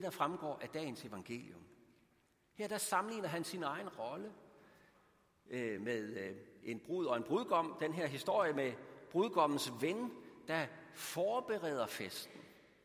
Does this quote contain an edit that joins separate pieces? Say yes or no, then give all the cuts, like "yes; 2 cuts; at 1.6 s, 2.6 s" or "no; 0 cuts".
no; 0 cuts